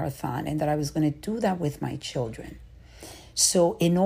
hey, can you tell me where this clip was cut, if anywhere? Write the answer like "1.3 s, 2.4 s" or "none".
none